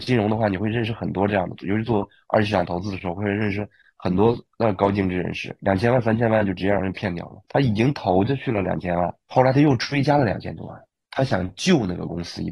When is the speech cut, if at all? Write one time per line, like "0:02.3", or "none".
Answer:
0:07.4
0:09.2